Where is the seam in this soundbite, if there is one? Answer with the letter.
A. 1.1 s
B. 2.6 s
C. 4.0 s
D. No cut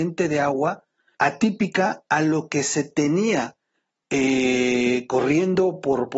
A